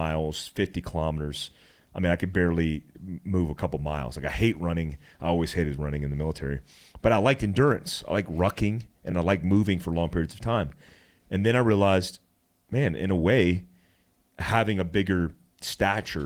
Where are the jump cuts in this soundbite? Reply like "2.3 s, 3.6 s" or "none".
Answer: none